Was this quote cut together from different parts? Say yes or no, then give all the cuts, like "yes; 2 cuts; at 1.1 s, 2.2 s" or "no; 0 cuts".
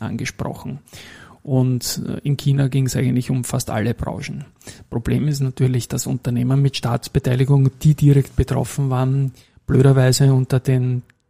no; 0 cuts